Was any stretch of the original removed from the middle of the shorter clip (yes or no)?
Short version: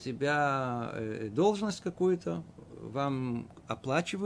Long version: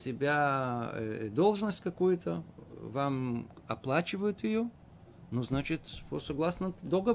no